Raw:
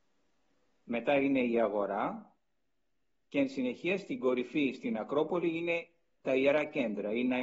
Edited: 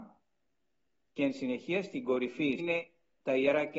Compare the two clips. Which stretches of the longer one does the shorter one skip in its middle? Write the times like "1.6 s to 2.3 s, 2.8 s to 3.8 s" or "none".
4.7 s to 5.6 s